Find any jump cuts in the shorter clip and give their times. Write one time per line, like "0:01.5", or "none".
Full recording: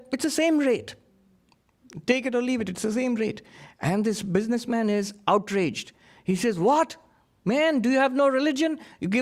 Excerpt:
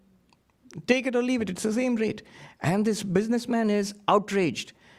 none